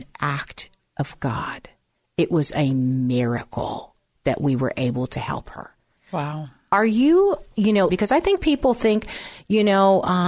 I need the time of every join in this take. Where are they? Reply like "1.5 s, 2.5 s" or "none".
6.0 s, 7.9 s

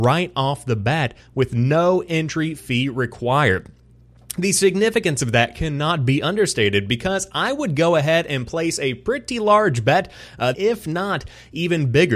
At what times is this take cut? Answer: 10.5 s

